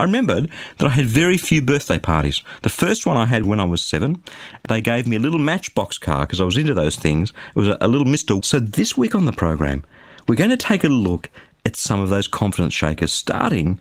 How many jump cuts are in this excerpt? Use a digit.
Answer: 1